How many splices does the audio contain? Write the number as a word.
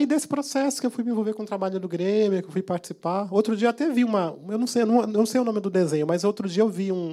zero